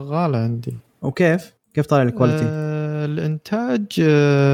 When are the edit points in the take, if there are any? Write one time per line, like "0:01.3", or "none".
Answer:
none